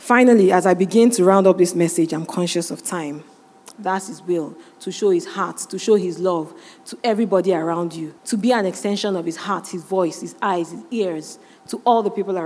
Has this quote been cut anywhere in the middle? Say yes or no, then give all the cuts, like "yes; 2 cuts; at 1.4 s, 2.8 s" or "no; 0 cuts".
yes; 2 cuts; at 3.7 s, 8.2 s